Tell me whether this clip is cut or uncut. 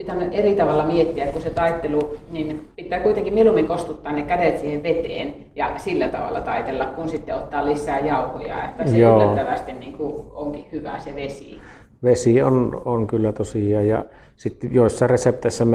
cut